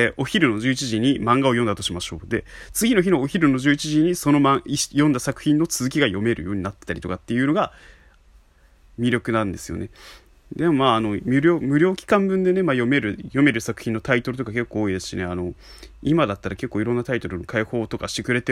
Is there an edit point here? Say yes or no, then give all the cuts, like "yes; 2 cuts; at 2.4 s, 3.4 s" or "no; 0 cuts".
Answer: no; 0 cuts